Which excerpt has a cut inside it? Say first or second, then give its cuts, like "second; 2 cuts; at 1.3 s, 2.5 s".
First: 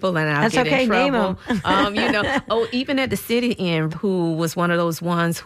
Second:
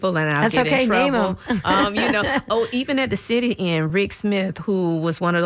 first; 1 cut; at 3.9 s